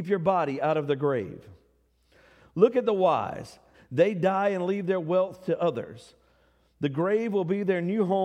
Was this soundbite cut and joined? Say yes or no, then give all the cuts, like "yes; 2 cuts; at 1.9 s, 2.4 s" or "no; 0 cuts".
yes; 1 cut; at 3.7 s